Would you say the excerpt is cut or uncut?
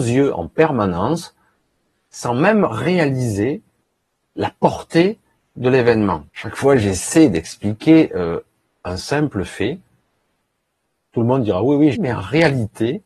cut